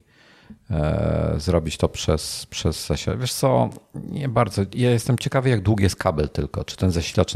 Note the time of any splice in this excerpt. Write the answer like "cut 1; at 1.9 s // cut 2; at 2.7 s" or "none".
none